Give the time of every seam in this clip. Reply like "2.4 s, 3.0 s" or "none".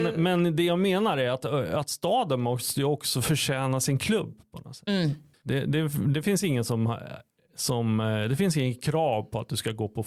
none